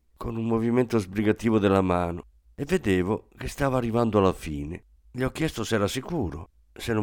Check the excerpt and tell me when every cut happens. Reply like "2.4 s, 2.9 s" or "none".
5.0 s

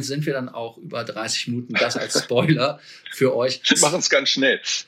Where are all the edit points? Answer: 3.7 s

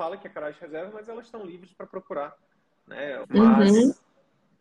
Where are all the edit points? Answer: 3.2 s

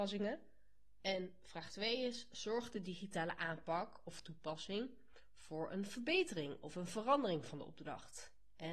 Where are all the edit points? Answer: 1.0 s

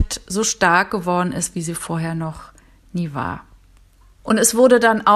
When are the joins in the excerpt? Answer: 4.2 s

